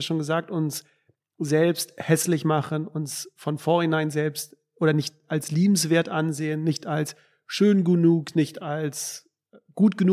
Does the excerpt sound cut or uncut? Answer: uncut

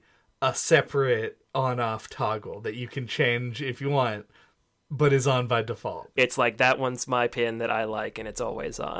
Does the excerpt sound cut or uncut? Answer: cut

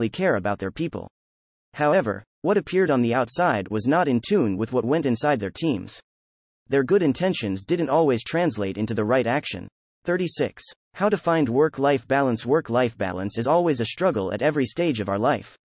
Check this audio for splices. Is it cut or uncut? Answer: uncut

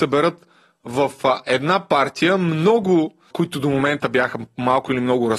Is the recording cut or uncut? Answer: cut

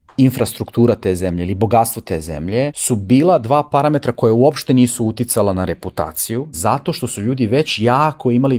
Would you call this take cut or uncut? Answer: cut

